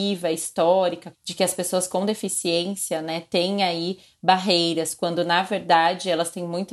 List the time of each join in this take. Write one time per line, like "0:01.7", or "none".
0:01.1